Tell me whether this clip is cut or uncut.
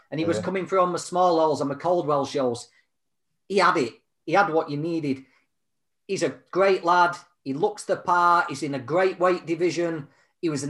uncut